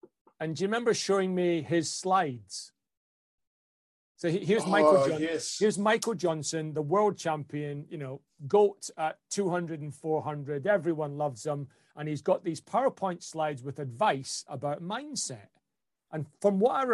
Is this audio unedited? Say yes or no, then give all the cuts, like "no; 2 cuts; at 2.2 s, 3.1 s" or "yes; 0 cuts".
yes; 0 cuts